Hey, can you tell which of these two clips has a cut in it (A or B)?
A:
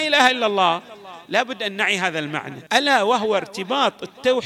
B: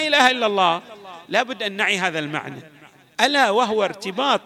A